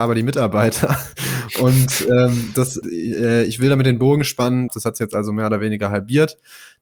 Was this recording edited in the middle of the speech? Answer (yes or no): yes